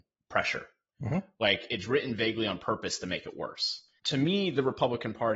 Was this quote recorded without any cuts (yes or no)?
no